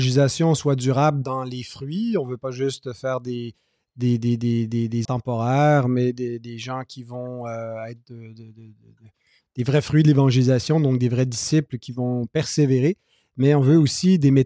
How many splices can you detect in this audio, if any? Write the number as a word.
one